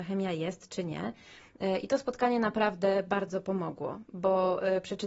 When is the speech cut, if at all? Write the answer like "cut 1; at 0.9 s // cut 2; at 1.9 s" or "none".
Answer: none